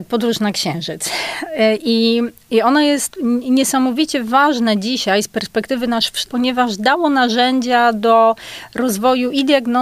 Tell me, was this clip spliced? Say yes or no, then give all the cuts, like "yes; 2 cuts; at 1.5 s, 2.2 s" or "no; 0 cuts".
yes; 1 cut; at 6.3 s